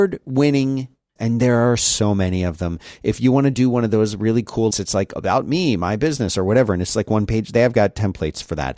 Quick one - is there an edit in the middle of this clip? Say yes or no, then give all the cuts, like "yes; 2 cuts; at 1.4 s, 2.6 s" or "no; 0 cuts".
yes; 2 cuts; at 1.2 s, 4.7 s